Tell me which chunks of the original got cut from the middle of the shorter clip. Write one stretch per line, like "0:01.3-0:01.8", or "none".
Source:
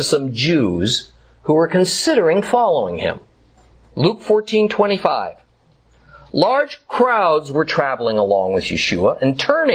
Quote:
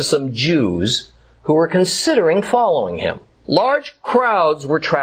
0:03.4-0:06.3